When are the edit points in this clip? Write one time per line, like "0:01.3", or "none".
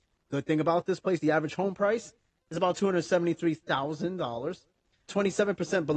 0:05.1